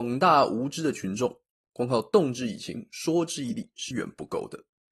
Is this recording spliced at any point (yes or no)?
yes